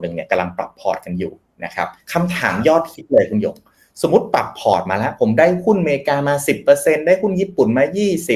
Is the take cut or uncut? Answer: cut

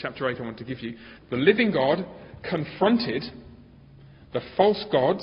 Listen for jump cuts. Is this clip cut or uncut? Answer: cut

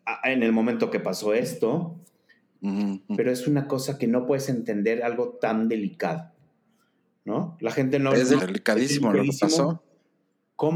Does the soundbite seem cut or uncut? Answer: cut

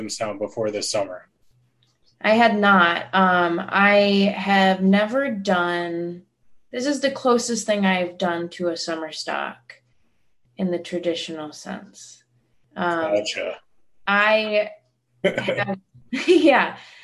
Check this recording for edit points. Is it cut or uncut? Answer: uncut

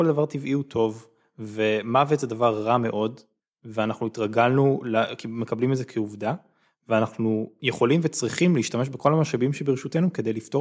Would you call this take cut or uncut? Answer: uncut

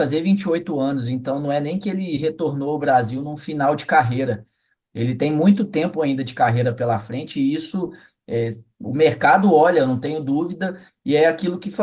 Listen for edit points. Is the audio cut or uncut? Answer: uncut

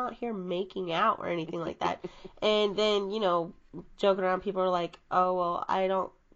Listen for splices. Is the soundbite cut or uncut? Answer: uncut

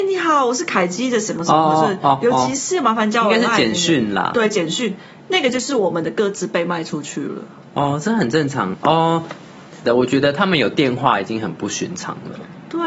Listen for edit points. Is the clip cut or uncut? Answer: cut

